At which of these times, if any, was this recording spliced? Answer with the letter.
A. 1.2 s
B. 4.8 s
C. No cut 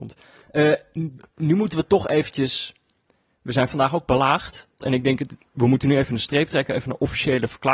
B